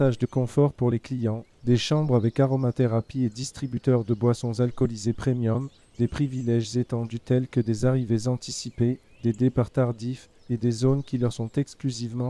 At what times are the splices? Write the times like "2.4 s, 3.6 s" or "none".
1.5 s